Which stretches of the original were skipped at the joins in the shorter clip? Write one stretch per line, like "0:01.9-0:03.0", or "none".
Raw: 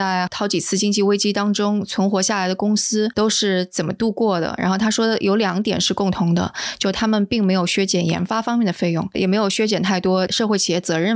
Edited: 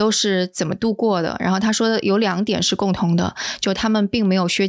none